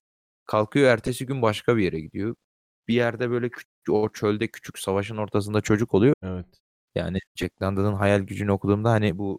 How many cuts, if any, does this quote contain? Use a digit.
2